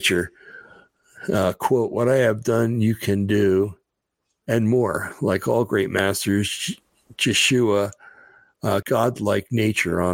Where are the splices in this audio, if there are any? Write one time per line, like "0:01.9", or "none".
0:08.8